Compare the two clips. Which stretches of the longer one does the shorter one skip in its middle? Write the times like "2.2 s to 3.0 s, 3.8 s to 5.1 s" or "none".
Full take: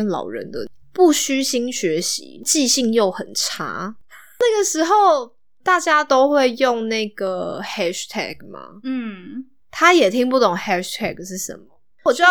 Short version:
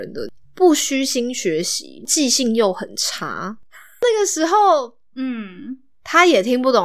5.5 s to 8.8 s